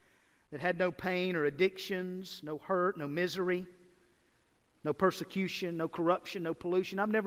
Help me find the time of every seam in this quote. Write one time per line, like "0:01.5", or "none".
none